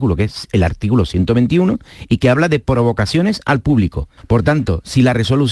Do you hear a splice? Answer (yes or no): yes